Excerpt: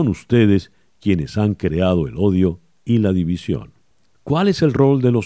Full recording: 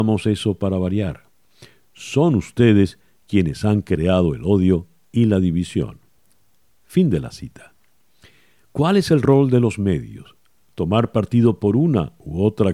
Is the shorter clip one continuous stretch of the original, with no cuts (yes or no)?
no